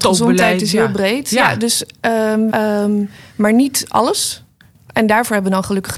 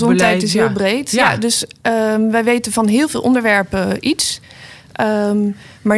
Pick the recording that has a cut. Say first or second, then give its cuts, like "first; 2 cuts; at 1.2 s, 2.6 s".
first; 1 cut; at 2.5 s